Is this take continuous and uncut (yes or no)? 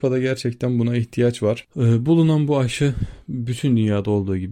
no